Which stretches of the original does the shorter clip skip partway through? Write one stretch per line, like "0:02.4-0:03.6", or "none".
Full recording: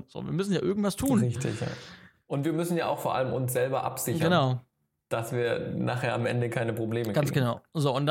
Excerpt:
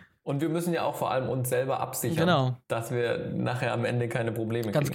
0:04.6-0:05.0